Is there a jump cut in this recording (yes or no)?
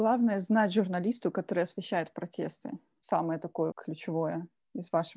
yes